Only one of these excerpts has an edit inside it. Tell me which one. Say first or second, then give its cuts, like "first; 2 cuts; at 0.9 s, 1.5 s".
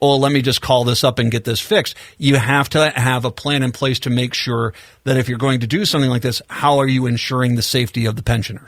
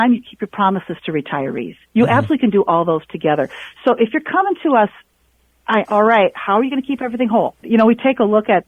second; 2 cuts; at 5.8 s, 7.6 s